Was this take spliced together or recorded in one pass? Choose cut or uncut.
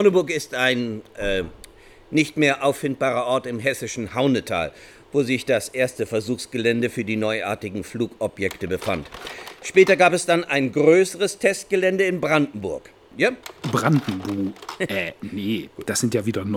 uncut